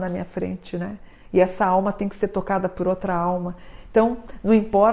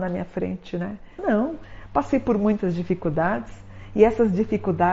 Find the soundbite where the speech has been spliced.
second; 1 cut; at 1.2 s

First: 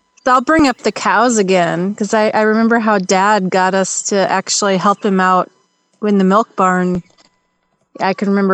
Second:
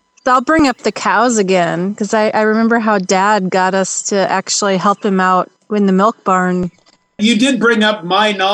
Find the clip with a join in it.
second; 2 cuts; at 5.6 s, 7.2 s

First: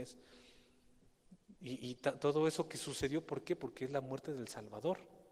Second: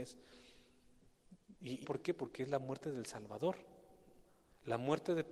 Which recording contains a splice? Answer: second; 1 cut; at 1.8 s

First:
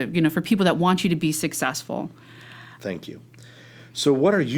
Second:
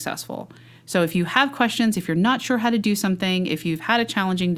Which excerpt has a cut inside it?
first; 1 cut; at 2.8 s

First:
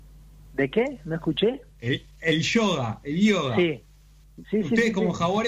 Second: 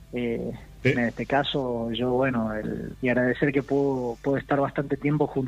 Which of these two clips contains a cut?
second; 2 cuts; at 0.9 s, 2.9 s

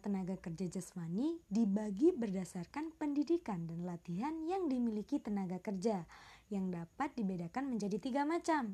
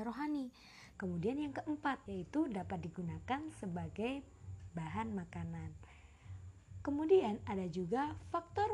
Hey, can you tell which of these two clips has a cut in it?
second; 2 cuts; at 0.9 s, 2.1 s

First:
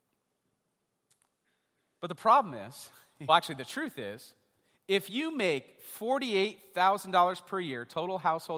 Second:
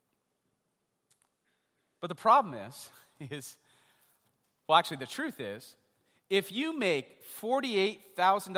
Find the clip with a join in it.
first; 1 cut; at 3.3 s

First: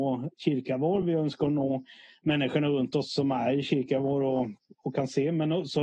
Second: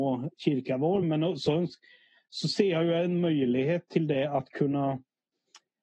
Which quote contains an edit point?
second; 1 cut; at 1.0 s

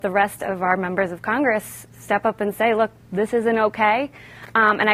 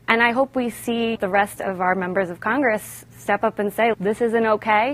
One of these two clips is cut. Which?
second; 2 cuts; at 1.2 s, 3.9 s

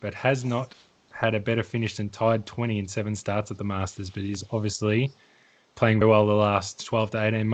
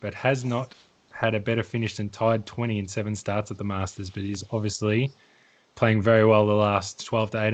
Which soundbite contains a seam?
first; 1 cut; at 6.0 s

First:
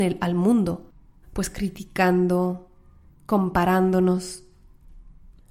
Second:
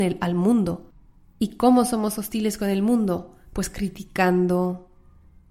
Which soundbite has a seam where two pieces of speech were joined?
first; 2 cuts; at 1.2 s, 3.1 s

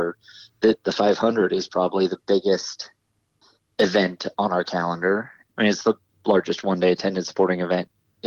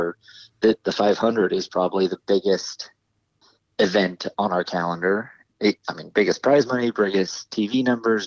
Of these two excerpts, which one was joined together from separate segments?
first; 1 cut; at 5.5 s

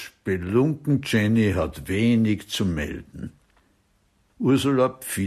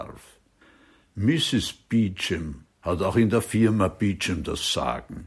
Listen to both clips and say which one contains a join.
first; 1 cut; at 4.3 s

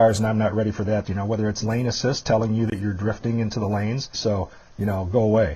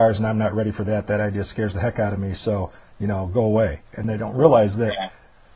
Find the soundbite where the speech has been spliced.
first; 2 cuts; at 1.0 s, 4.1 s

